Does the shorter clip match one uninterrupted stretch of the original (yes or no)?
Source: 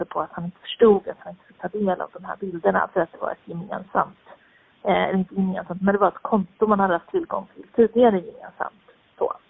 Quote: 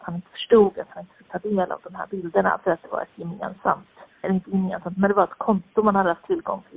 no